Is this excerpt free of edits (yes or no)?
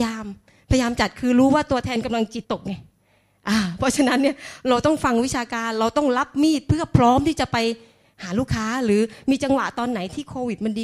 no